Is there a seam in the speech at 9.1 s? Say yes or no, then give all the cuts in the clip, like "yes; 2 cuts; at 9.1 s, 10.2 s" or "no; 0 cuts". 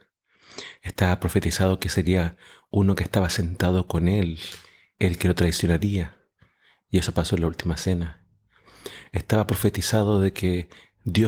no; 0 cuts